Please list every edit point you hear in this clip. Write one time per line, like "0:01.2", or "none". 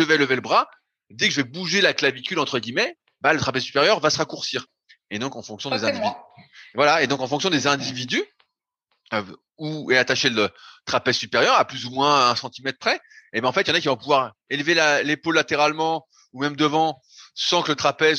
none